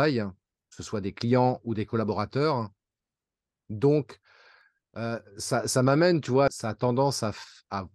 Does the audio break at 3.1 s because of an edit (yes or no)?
no